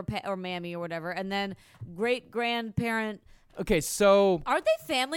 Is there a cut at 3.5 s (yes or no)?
yes